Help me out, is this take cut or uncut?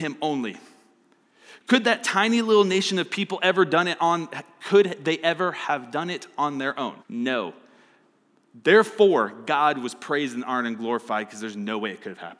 cut